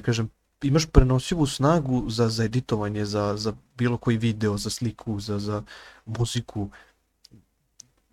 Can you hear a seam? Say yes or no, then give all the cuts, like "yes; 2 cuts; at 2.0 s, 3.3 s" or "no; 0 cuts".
no; 0 cuts